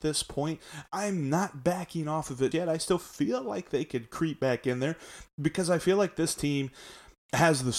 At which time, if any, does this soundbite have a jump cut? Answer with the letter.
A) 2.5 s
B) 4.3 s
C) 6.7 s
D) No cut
A